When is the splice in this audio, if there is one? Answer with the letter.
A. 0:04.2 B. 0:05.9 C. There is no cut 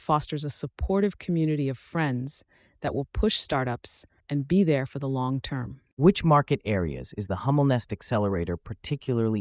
A